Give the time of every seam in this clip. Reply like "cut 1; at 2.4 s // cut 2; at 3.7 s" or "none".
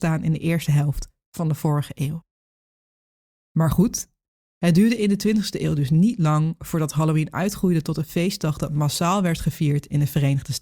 none